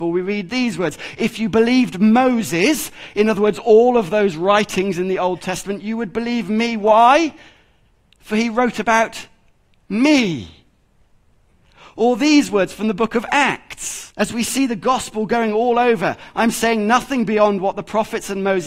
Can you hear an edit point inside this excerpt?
yes; 1 cut; at 14.1 s

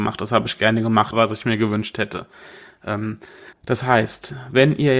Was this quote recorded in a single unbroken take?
no; 2 cuts; at 1.1 s, 3.5 s

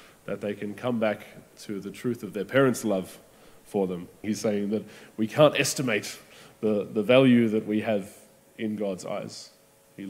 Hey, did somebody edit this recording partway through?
yes; 1 cut; at 4.2 s

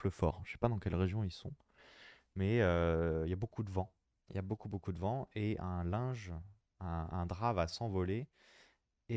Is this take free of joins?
yes; 0 cuts

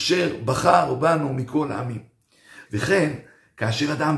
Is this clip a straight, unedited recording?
no; 1 cut; at 2.6 s

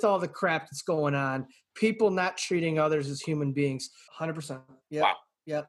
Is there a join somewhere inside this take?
yes; 1 cut; at 4.1 s

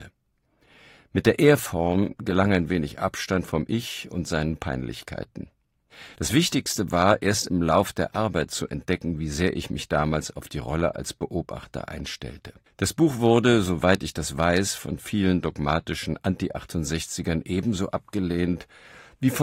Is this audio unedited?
no; 1 cut; at 12.7 s

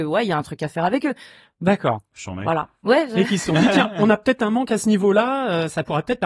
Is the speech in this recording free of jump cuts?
yes; 0 cuts

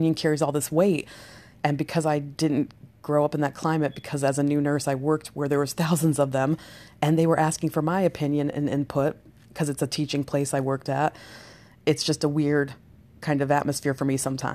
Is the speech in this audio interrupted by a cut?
no; 0 cuts

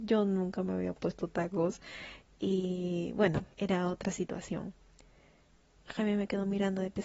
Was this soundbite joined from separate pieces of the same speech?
yes; 2 cuts; at 3.5 s, 5.8 s

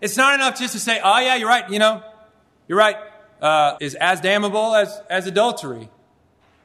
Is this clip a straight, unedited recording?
no; 1 cut; at 3.8 s

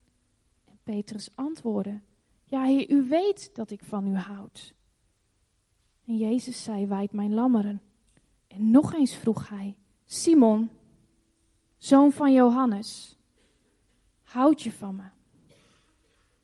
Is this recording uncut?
yes; 0 cuts

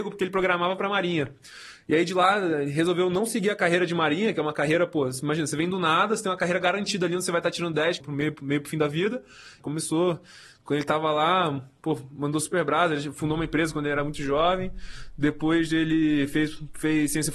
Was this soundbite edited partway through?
yes; 2 cuts; at 8.0 s, 9.6 s

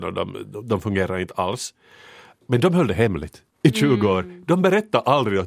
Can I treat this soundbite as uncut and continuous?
no; 1 cut; at 3.5 s

